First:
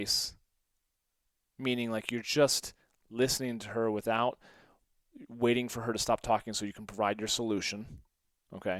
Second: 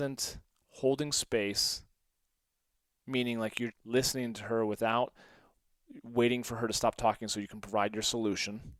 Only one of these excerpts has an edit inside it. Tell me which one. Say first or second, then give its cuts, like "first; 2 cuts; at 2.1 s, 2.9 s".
second; 1 cut; at 3.7 s